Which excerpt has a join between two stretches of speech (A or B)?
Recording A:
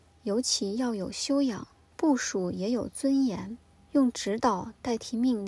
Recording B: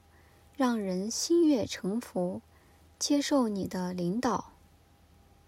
A